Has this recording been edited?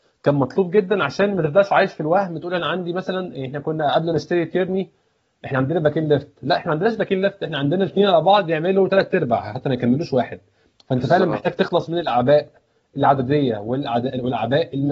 no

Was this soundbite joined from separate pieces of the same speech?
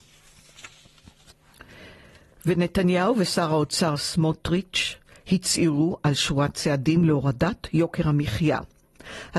no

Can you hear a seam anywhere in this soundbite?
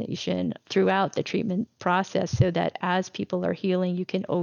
no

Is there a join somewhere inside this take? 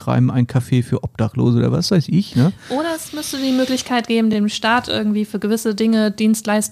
no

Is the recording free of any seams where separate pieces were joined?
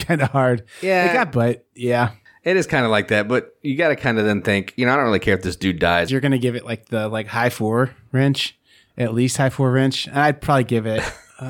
no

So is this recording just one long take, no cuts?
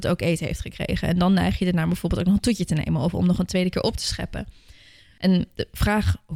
yes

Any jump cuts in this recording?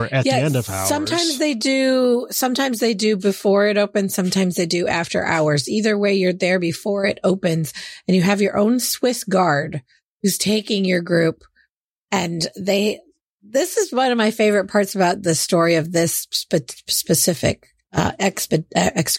no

